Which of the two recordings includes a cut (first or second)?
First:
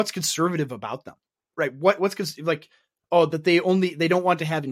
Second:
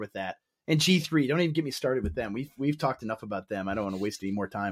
first